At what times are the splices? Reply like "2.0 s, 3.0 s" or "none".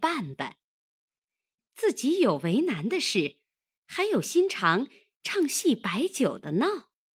1.6 s